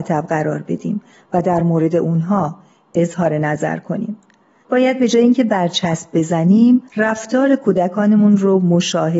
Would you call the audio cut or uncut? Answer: cut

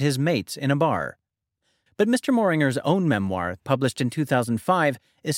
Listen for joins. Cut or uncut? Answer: cut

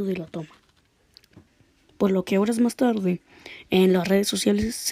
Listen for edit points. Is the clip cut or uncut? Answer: uncut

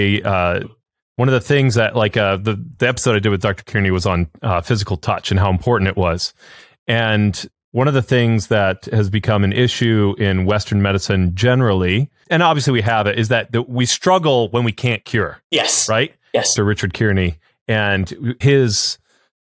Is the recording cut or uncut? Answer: cut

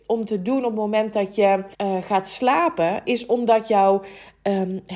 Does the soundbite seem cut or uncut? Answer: cut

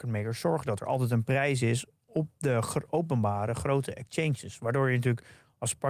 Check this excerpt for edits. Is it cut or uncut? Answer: uncut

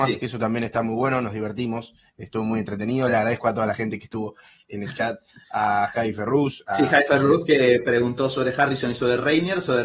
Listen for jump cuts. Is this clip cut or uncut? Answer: uncut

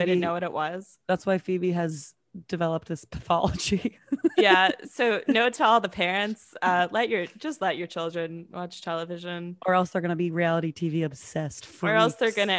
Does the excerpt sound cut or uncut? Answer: uncut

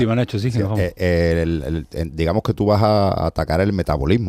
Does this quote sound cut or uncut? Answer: uncut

